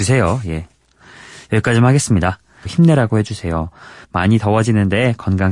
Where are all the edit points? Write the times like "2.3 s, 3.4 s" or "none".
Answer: 2.7 s, 4.0 s